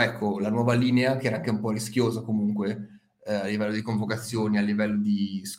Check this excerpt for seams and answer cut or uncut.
uncut